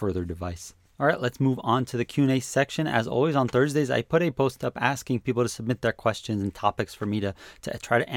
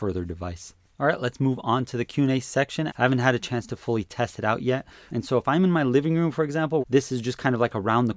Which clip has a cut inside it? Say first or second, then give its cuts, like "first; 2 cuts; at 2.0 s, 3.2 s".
second; 3 cuts; at 2.9 s, 5.1 s, 6.8 s